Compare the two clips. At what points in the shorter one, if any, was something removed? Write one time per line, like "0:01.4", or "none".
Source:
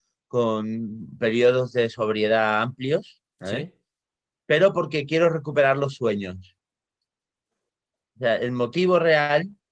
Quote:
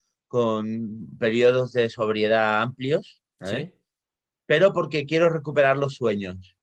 none

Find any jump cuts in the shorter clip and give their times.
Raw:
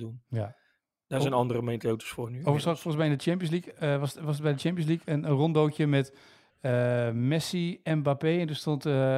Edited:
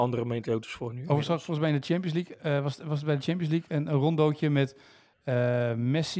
none

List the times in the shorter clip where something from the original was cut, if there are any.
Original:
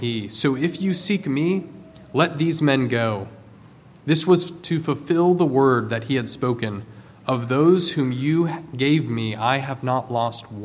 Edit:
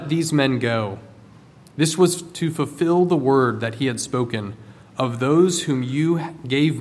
none

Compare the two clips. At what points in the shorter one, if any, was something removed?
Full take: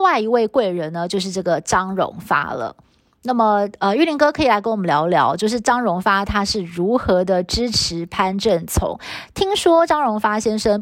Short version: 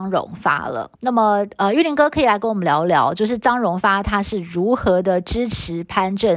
0:01.0

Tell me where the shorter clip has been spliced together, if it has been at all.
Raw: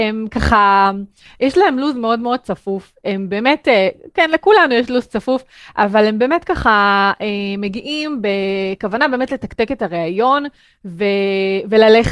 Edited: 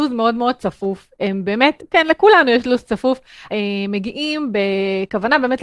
0:01.8
0:03.5

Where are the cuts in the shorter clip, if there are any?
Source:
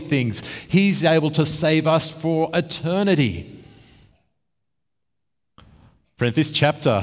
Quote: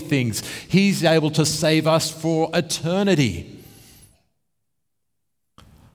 none

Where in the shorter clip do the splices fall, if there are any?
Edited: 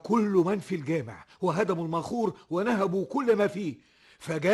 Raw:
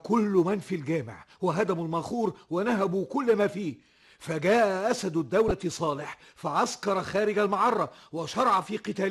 none

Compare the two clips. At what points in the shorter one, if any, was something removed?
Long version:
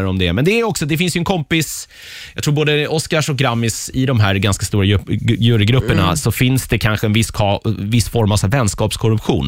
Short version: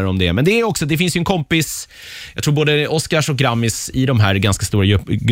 none

